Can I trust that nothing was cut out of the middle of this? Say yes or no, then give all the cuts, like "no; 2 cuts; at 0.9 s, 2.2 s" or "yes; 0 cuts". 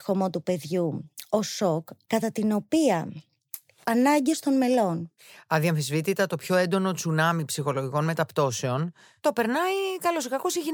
no; 2 cuts; at 2.1 s, 3.8 s